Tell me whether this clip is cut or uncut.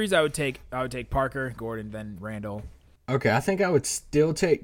cut